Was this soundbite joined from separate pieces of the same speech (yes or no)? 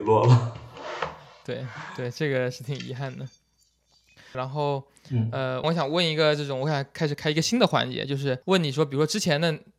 yes